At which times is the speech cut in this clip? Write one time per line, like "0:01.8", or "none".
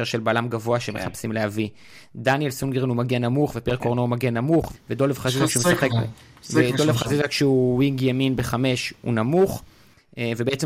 0:04.7
0:05.9